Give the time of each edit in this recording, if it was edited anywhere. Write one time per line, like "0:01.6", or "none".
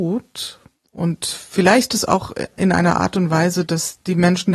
0:02.5